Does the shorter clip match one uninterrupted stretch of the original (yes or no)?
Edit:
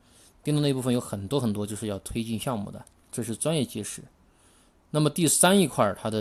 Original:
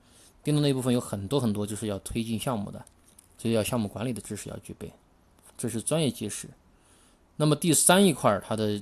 no